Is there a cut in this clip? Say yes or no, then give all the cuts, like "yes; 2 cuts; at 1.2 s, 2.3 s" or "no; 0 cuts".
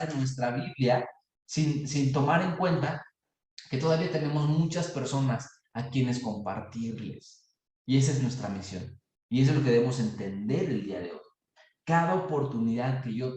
no; 0 cuts